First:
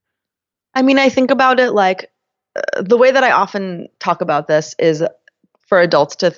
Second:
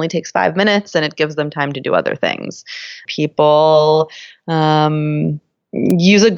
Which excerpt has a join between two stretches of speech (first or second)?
second